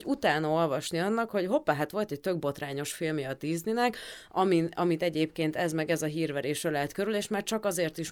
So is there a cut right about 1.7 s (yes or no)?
no